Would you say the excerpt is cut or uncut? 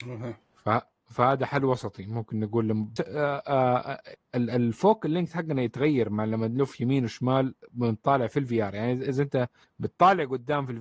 cut